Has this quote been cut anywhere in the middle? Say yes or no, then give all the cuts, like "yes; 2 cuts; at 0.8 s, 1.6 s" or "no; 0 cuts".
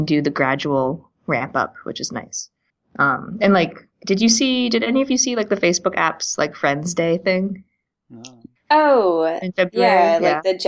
no; 0 cuts